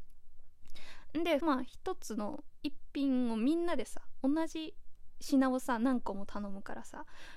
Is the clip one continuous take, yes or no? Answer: no